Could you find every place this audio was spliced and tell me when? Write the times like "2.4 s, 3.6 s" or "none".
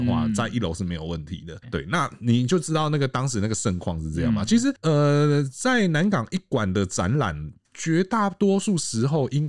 none